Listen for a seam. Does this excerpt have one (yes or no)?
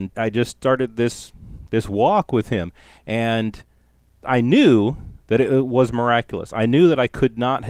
no